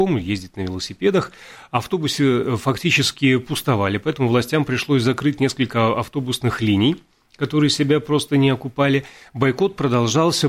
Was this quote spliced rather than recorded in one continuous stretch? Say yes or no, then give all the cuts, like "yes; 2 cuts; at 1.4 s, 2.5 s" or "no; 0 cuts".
no; 0 cuts